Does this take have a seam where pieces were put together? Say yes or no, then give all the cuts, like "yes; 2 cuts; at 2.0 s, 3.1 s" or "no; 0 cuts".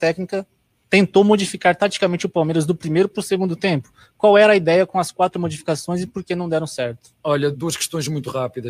yes; 1 cut; at 7.5 s